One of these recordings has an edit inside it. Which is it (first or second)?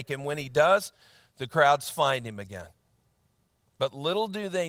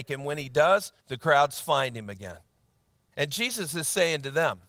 second